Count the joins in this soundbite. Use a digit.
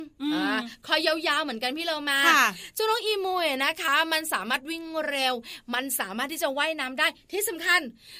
0